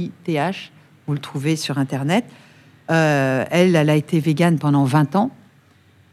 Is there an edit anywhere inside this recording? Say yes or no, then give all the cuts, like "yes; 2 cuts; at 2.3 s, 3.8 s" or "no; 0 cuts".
no; 0 cuts